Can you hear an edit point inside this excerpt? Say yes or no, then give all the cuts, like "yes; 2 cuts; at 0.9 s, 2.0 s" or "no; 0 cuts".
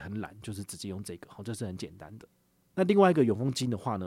no; 0 cuts